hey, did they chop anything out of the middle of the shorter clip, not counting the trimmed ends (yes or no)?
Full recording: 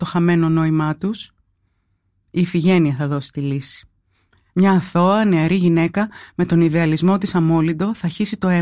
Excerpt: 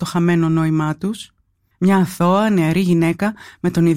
yes